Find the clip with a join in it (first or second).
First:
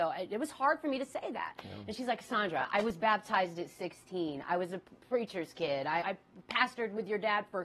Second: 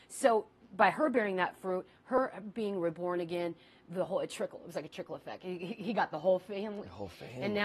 first